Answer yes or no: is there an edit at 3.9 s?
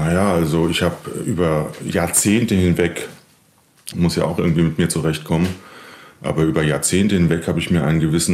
yes